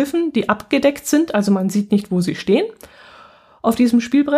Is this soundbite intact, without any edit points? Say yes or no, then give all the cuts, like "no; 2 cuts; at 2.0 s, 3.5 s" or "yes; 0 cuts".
yes; 0 cuts